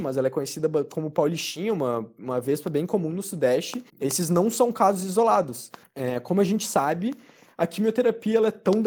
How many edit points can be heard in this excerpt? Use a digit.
2